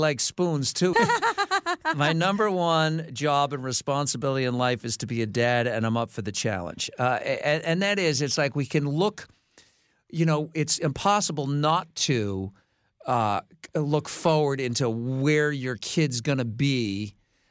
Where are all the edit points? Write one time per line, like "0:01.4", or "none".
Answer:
0:00.9